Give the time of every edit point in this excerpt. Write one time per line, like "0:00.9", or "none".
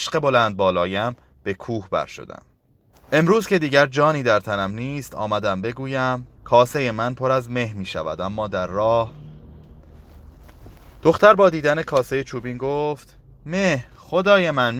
0:02.9
0:06.4